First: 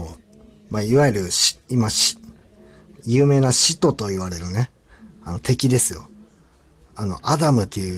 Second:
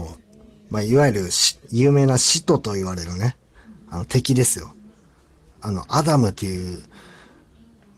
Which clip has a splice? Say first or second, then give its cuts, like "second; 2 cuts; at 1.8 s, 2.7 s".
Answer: second; 1 cut; at 1.6 s